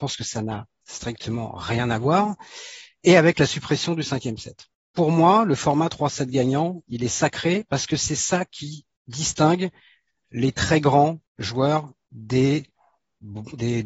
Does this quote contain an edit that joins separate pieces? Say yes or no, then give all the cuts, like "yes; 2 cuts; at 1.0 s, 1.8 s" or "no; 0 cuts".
yes; 1 cut; at 11.3 s